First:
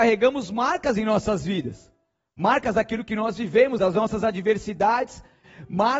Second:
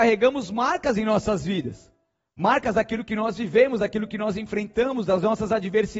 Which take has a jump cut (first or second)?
first